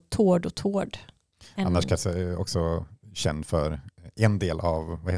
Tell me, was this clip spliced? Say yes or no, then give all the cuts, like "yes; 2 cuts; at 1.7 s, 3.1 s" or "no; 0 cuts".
no; 0 cuts